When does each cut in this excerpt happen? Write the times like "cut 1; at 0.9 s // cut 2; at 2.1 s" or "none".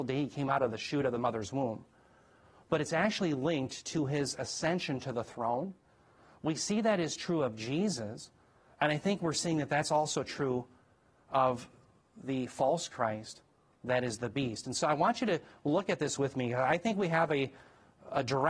none